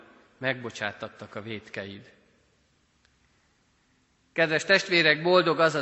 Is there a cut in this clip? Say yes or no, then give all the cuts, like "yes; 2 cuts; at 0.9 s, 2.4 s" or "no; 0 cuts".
no; 0 cuts